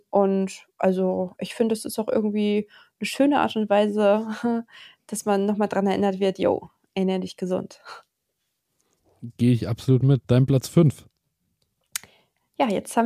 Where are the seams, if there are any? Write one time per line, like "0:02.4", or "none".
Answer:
none